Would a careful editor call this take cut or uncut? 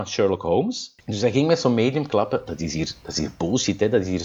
cut